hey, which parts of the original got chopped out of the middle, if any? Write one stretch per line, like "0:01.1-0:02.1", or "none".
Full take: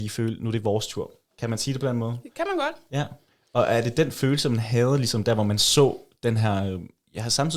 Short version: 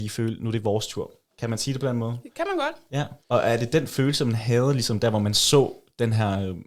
0:03.2-0:03.5